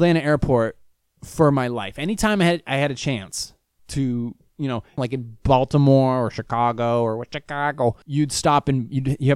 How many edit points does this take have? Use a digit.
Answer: 2